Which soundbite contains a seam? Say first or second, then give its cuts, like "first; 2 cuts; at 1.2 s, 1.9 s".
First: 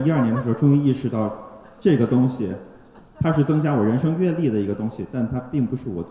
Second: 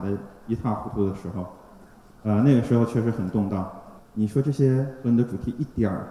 second; 1 cut; at 4.0 s